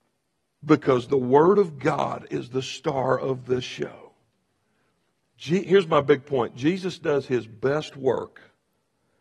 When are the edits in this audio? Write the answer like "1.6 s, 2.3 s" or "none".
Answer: 5.2 s